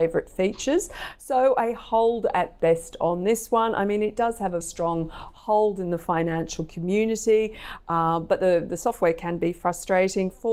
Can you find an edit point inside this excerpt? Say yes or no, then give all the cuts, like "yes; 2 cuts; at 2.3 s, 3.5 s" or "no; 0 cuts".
yes; 1 cut; at 4.6 s